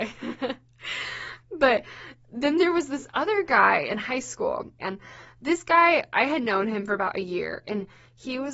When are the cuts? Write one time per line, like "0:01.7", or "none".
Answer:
0:04.8